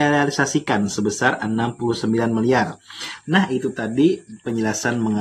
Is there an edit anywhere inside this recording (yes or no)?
yes